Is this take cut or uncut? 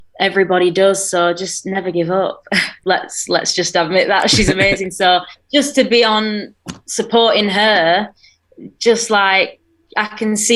cut